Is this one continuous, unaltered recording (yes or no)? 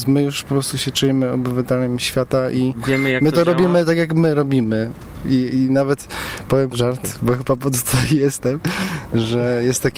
yes